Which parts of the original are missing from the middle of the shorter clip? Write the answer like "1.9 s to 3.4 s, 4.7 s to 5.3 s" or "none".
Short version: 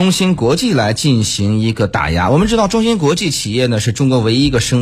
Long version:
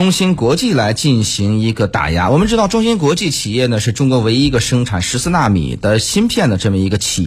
none